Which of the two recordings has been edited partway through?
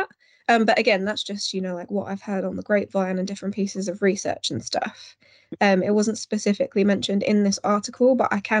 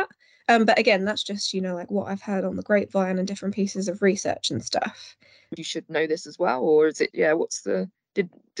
second; 2 cuts; at 5.6 s, 7.1 s

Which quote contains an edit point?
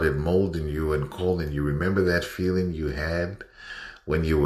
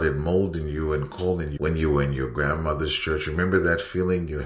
second; 1 cut; at 1.6 s

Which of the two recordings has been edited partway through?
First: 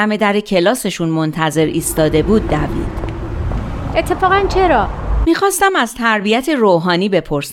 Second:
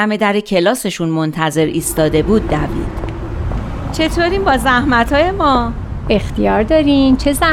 first; 2 cuts; at 3.9 s, 5.2 s

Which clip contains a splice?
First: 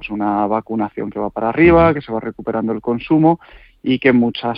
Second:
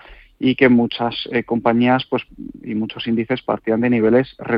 first; 1 cut; at 2.0 s

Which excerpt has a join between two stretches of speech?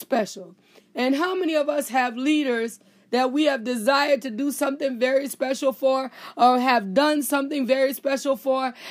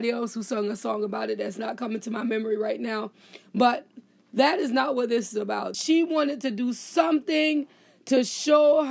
second; 1 cut; at 5.7 s

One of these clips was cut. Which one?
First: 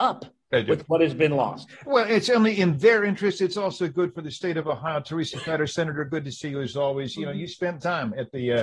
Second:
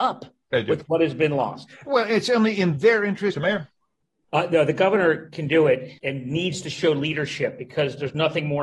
second; 2 cuts; at 3.3 s, 6.0 s

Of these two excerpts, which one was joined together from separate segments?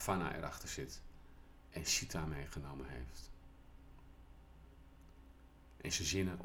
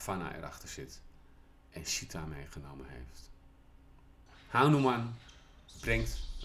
second; 1 cut; at 4.3 s

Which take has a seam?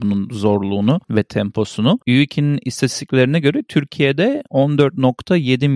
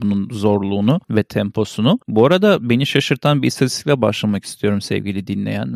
first; 1 cut; at 2.0 s

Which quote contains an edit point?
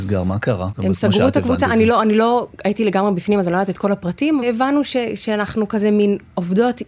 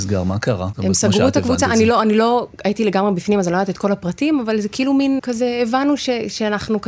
first; 1 cut; at 4.4 s

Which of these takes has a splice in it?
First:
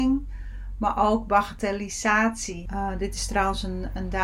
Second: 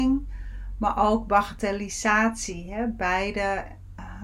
first; 1 cut; at 2.7 s

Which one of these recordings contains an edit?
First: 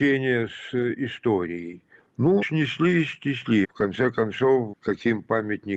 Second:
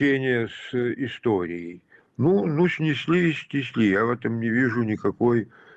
first; 3 cuts; at 2.4 s, 3.6 s, 4.7 s

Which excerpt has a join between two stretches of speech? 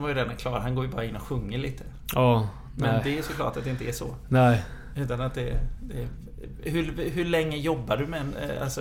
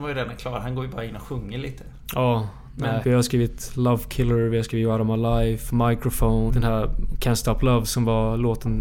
second; 2 cuts; at 3.0 s, 6.5 s

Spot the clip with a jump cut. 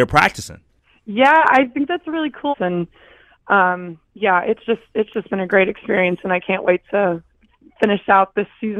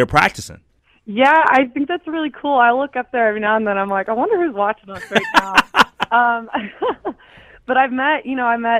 first; 1 cut; at 2.5 s

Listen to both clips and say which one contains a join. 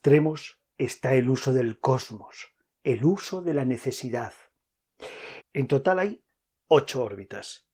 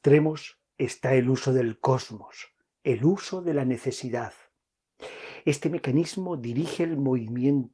first; 1 cut; at 5.4 s

